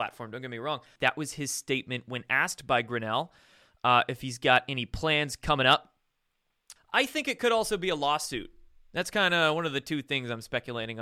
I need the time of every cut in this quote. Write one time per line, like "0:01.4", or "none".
0:01.0
0:06.8